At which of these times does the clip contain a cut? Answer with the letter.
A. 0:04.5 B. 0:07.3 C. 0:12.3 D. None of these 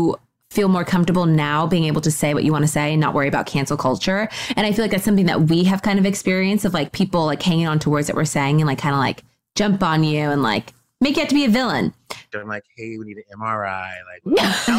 C